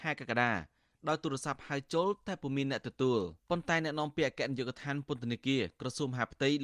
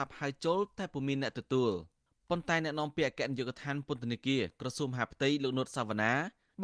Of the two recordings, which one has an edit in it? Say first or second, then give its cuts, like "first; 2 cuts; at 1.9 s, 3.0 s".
first; 1 cut; at 3.4 s